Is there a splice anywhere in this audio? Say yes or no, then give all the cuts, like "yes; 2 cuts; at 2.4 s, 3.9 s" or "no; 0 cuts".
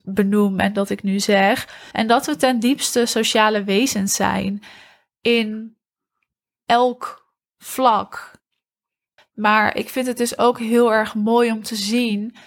yes; 2 cuts; at 1.9 s, 9.2 s